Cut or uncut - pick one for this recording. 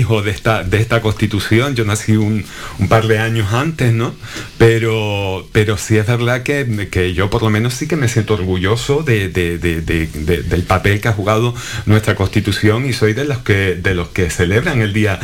uncut